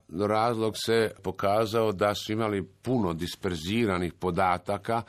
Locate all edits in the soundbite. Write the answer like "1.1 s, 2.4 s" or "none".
none

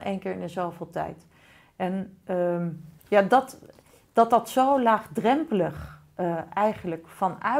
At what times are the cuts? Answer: 3.0 s

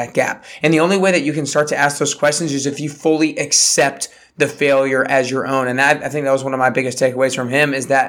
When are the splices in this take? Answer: none

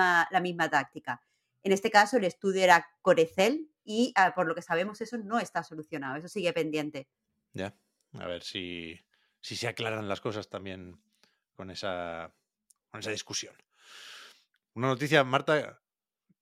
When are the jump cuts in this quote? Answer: none

